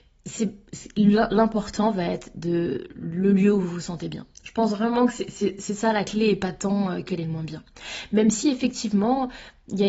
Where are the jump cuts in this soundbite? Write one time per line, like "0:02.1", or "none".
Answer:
0:07.1